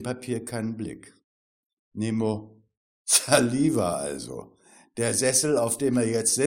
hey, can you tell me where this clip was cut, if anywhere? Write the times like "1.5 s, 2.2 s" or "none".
none